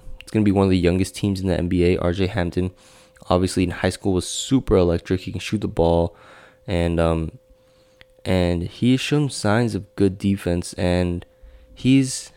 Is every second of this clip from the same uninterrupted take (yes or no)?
yes